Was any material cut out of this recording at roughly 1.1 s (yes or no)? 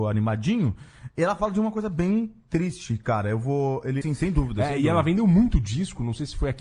no